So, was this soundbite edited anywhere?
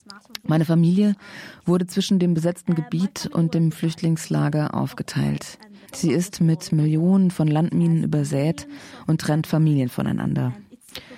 yes; 1 cut; at 5.8 s

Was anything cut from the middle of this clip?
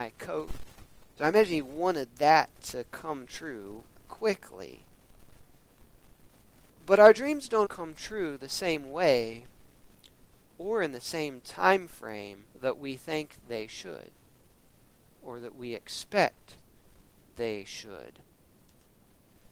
yes; 3 cuts; at 1.0 s, 7.6 s, 12.5 s

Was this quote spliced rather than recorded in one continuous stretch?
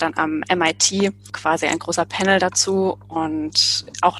no; 0 cuts

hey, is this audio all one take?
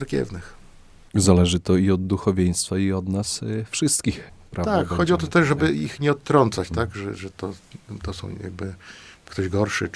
yes; 0 cuts

